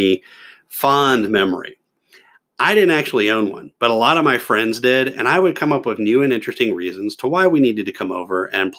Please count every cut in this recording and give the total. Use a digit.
0